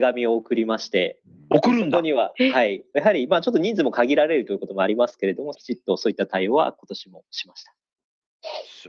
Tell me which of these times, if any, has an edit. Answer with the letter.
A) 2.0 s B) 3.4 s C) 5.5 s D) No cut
C